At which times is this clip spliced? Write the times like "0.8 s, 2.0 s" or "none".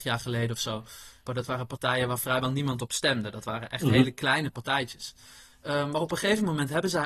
1.3 s